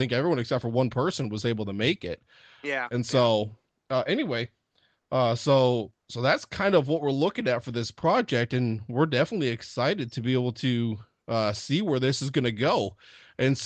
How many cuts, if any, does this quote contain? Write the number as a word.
zero